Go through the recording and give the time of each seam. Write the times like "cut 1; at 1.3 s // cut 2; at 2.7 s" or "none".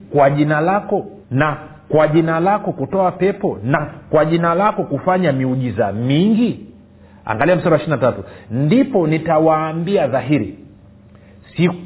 cut 1; at 1.2 s